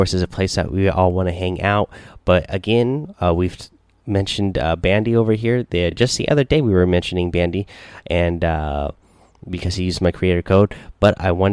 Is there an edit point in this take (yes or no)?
no